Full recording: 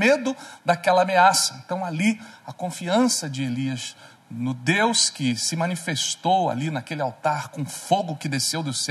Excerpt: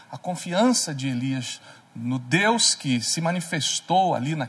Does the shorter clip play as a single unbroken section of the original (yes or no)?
yes